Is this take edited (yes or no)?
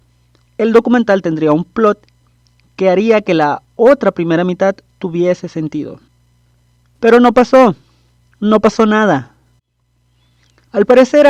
no